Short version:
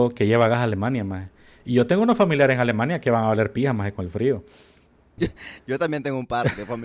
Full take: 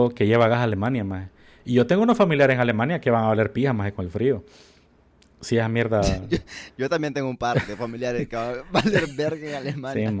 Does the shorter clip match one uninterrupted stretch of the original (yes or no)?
no